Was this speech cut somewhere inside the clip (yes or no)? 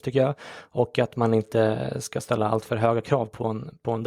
no